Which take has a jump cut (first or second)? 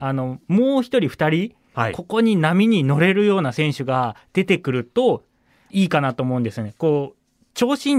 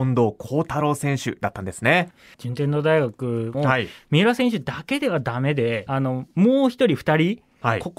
second